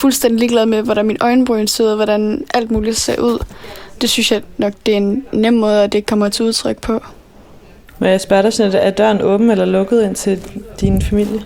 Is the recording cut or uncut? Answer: uncut